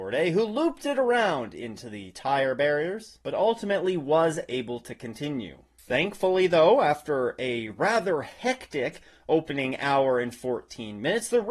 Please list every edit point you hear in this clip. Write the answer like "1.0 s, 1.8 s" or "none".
3.2 s